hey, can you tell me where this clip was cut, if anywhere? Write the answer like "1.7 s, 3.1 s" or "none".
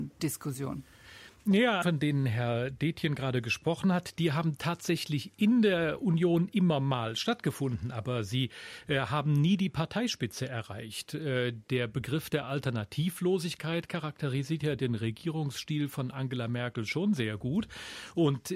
1.8 s